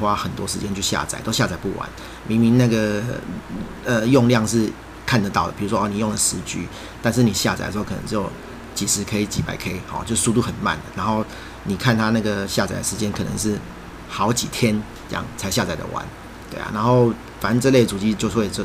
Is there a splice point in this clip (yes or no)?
no